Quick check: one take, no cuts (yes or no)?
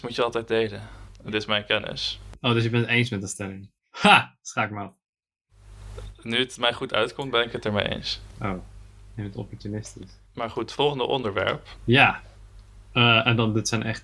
no